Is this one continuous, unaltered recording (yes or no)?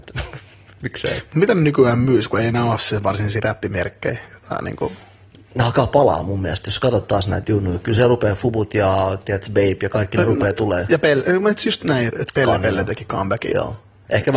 no